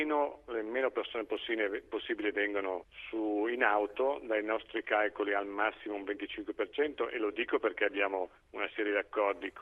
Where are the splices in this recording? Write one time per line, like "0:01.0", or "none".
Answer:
none